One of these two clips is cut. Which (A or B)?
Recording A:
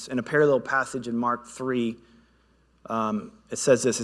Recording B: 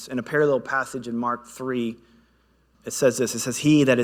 B